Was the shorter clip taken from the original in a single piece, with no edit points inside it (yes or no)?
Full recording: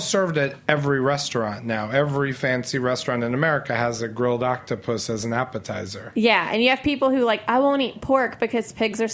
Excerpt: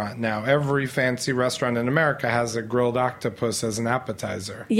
yes